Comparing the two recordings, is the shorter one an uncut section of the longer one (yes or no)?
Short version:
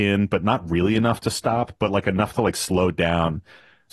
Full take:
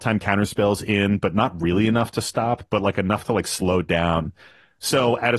yes